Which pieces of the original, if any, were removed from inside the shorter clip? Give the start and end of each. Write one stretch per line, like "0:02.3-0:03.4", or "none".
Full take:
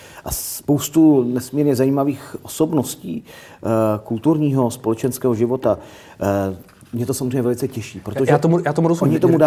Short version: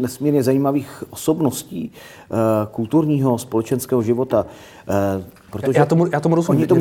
0:06.8-0:08.0